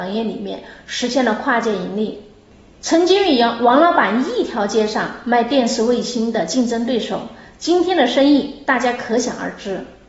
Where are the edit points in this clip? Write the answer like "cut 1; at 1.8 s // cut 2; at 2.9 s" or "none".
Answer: none